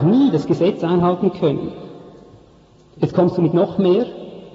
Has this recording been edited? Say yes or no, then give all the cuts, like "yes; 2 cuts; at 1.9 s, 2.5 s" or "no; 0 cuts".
no; 0 cuts